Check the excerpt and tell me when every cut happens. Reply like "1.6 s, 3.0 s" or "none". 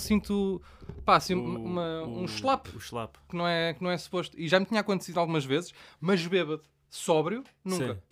none